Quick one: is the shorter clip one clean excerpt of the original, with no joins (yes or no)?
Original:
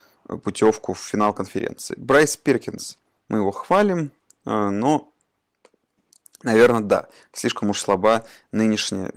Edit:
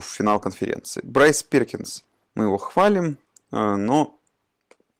yes